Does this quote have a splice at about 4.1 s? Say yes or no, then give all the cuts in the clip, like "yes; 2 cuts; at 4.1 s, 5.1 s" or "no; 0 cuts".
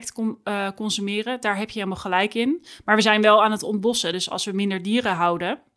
no; 0 cuts